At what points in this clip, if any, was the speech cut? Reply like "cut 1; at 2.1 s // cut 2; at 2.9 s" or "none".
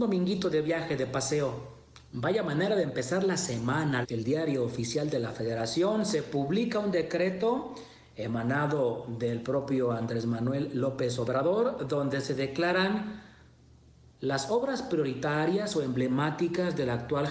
cut 1; at 2.1 s // cut 2; at 4.0 s